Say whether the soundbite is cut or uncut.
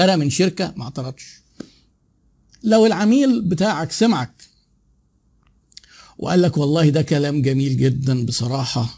uncut